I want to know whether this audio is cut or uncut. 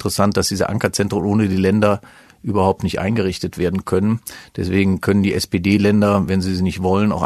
uncut